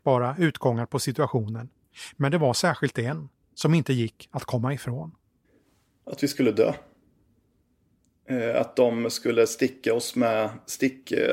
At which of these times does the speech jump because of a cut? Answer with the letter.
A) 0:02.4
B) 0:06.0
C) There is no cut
C